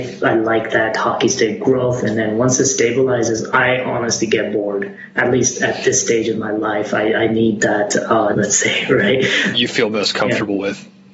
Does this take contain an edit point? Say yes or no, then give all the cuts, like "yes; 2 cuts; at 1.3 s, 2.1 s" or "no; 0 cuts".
yes; 2 cuts; at 8.3 s, 9.5 s